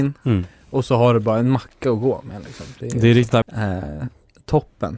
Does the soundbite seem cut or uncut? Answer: cut